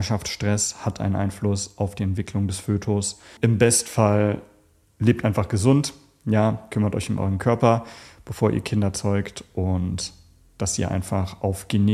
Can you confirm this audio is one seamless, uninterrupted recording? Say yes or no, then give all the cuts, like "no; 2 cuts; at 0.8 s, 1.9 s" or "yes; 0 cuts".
no; 1 cut; at 3.4 s